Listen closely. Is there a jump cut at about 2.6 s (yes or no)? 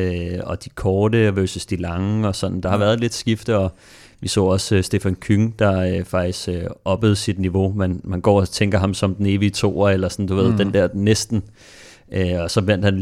no